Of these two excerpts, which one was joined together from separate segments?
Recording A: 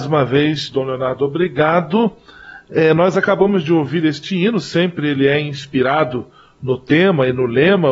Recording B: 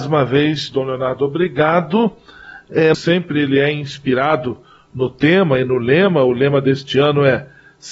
B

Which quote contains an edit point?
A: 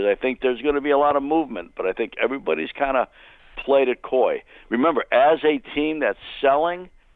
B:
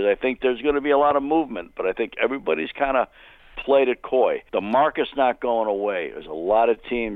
B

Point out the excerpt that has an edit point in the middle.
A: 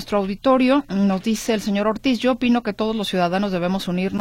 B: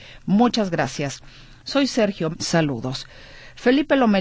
B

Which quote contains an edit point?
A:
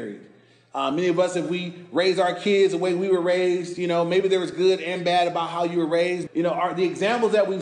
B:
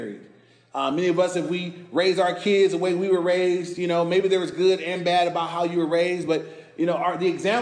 A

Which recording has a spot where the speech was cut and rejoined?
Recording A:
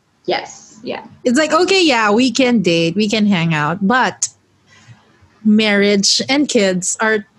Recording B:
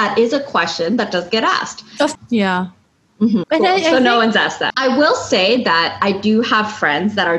B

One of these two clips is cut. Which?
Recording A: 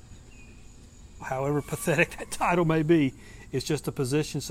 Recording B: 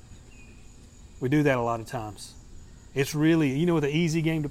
A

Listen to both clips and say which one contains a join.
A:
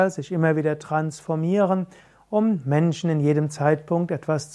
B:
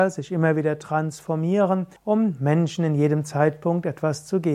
B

